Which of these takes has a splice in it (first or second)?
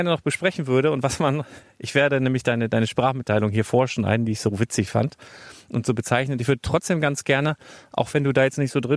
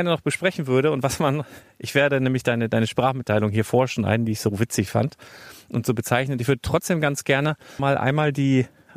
second